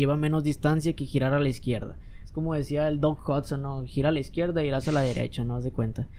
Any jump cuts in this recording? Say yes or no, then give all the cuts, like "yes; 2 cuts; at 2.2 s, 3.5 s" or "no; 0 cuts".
no; 0 cuts